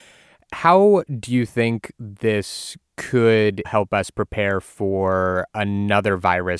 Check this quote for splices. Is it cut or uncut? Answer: cut